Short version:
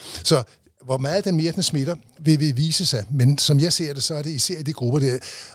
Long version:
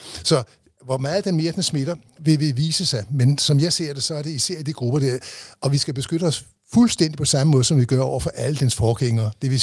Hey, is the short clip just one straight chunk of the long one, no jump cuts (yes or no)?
yes